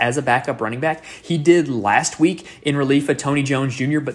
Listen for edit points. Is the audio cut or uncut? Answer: uncut